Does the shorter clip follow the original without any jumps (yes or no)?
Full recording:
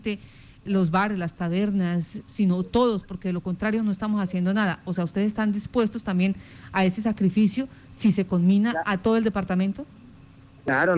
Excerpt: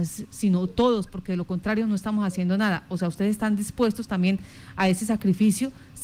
yes